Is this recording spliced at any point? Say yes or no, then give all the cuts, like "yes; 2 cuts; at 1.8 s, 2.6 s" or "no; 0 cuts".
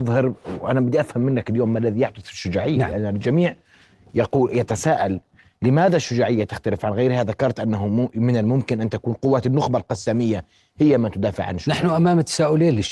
no; 0 cuts